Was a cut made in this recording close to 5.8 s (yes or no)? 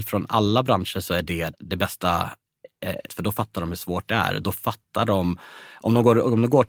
no